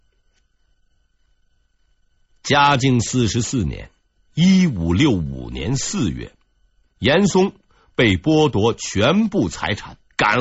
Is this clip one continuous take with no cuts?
yes; 0 cuts

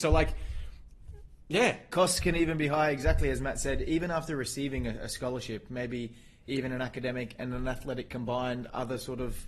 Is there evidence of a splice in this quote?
no; 0 cuts

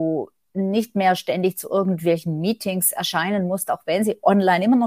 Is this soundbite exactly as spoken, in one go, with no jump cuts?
yes; 0 cuts

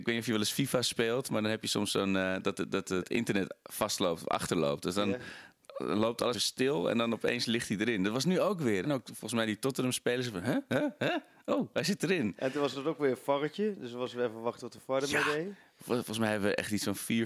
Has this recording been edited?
yes; 2 cuts; at 6.3 s, 8.8 s

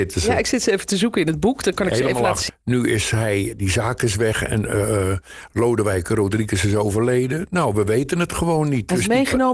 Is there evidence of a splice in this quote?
yes; 1 cut; at 2.5 s

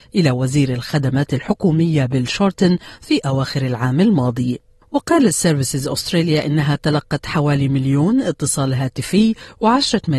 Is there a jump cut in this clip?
no; 0 cuts

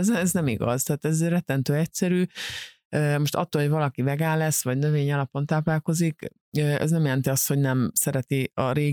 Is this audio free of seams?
yes; 0 cuts

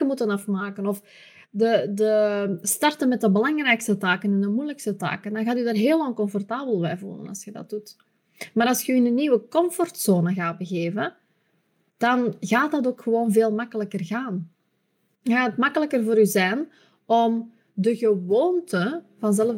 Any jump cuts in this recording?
no; 0 cuts

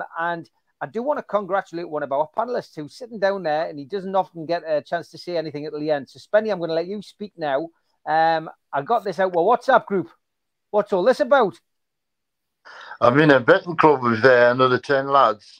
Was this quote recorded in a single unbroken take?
yes; 0 cuts

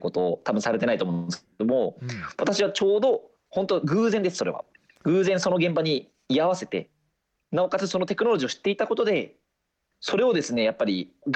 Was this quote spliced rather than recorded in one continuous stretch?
no; 0 cuts

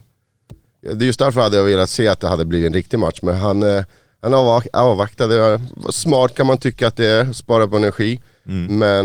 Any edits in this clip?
no; 0 cuts

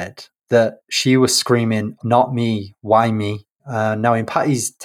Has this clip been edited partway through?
yes; 2 cuts; at 2.0 s, 3.6 s

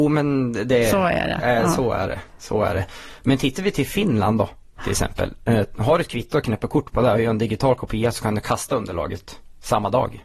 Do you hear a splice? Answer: no; 0 cuts

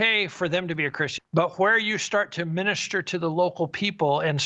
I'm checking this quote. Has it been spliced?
yes; 1 cut; at 1.2 s

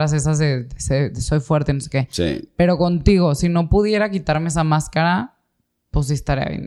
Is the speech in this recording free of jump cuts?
yes; 0 cuts

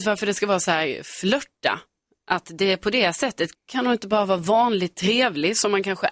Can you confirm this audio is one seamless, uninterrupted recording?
no; 1 cut; at 3.5 s

